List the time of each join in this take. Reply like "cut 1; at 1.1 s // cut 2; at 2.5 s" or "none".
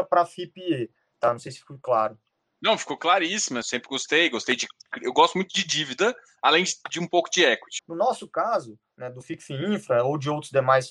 cut 1; at 3.6 s // cut 2; at 7.8 s